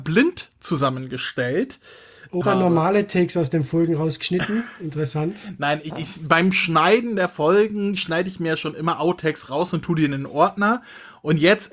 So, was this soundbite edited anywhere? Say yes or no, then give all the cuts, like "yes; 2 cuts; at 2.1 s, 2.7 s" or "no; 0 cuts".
yes; 2 cuts; at 2.4 s, 5.9 s